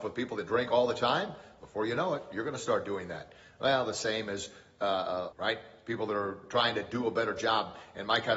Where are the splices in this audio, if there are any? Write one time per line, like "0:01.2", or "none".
0:05.3